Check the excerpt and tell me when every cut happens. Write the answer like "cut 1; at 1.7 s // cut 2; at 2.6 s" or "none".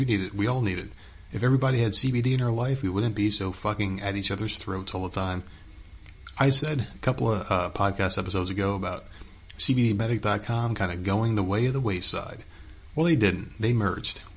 none